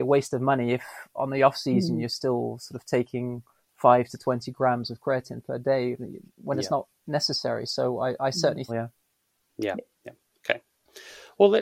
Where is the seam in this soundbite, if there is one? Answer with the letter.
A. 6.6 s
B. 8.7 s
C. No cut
B